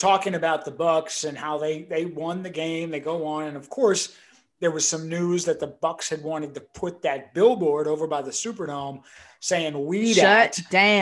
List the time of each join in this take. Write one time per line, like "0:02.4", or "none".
none